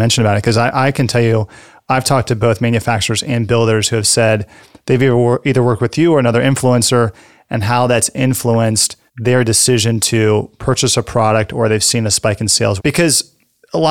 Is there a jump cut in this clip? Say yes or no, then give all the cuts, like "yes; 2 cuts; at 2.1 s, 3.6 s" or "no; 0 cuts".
yes; 2 cuts; at 9.1 s, 12.8 s